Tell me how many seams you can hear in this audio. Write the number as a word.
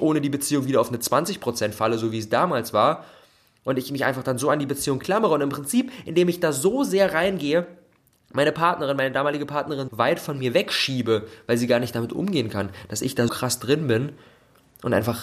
two